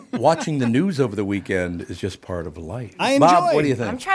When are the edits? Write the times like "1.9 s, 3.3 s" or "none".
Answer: 3.0 s